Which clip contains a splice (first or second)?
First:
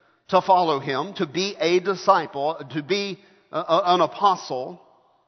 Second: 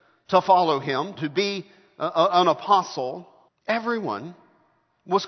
second